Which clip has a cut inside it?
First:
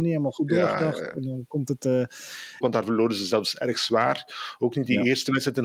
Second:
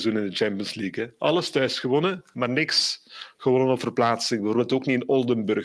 first; 1 cut; at 2.6 s

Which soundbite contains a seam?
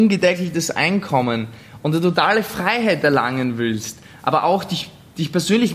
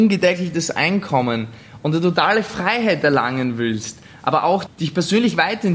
second; 1 cut; at 4.7 s

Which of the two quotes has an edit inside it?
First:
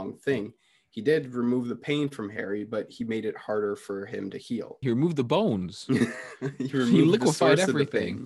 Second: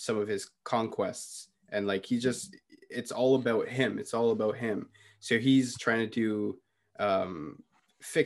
first; 1 cut; at 4.8 s

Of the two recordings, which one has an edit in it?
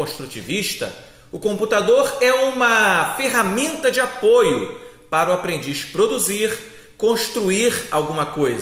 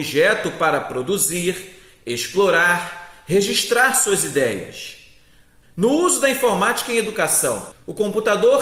second; 2 cuts; at 5.6 s, 7.7 s

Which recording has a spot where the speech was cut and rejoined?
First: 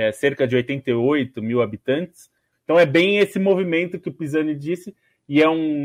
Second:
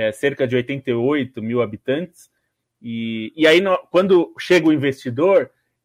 first; 1 cut; at 2.5 s

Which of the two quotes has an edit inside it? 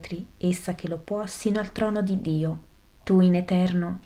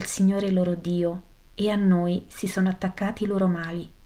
first; 1 cut; at 3.0 s

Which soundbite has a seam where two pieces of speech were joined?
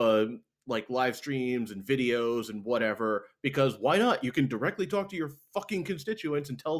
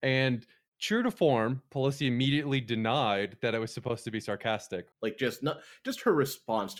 second; 1 cut; at 4.9 s

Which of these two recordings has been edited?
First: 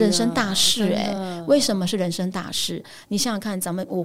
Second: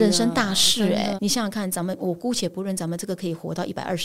second; 1 cut; at 1.2 s

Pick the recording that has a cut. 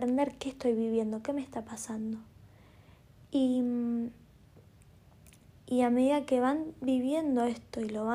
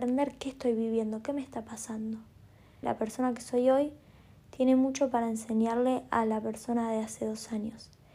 second; 1 cut; at 2.8 s

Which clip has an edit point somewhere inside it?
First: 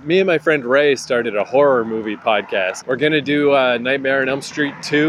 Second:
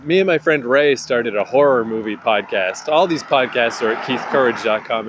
first; 1 cut; at 2.8 s

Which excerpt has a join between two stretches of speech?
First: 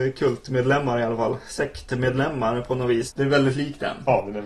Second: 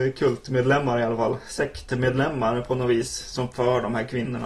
first; 1 cut; at 3.1 s

